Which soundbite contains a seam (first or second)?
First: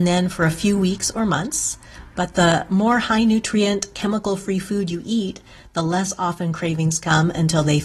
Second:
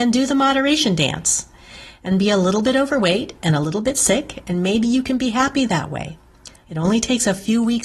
second